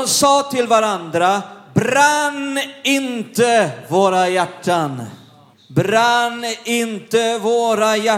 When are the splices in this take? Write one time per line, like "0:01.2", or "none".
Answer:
0:05.5